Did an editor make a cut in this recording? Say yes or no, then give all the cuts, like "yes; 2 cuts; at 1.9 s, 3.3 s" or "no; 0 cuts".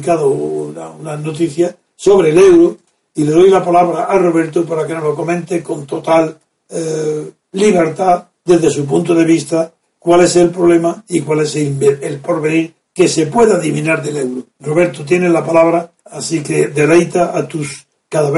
yes; 2 cuts; at 14.5 s, 16.0 s